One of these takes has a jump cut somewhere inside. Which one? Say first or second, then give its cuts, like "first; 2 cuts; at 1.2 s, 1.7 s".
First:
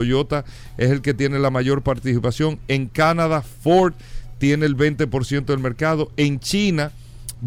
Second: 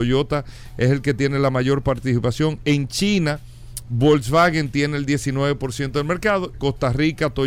second; 2 cuts; at 2.6 s, 6.5 s